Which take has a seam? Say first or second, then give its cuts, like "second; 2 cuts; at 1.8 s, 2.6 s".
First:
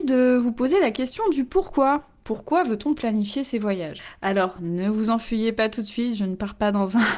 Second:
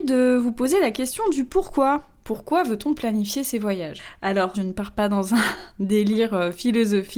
second; 1 cut; at 4.5 s